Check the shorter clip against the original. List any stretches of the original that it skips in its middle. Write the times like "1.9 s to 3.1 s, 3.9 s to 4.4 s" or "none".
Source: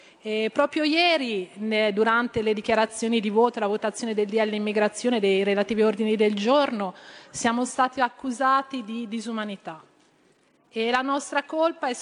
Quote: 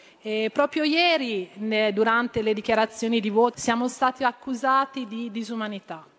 3.5 s to 7.3 s